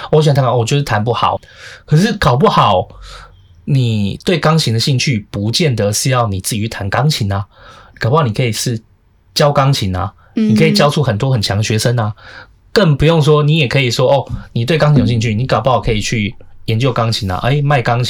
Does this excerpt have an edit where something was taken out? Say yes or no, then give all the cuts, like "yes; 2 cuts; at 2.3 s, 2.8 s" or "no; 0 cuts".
yes; 1 cut; at 1.4 s